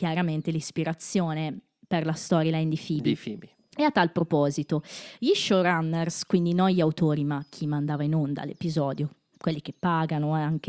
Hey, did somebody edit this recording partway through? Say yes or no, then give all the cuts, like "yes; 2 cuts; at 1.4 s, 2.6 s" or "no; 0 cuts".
no; 0 cuts